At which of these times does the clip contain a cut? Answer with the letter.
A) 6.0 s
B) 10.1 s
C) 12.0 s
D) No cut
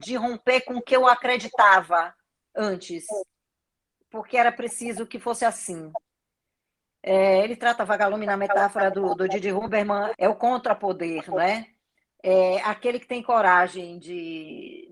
B